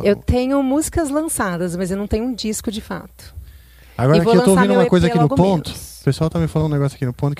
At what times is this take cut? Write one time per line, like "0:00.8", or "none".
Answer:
none